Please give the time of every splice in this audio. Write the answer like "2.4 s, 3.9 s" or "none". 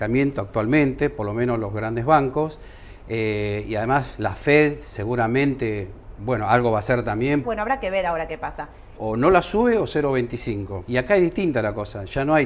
7.4 s, 9.0 s, 10.9 s